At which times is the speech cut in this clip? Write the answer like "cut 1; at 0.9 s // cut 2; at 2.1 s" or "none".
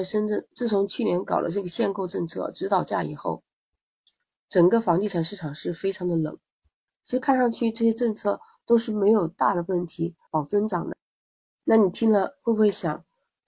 cut 1; at 6.9 s // cut 2; at 10.3 s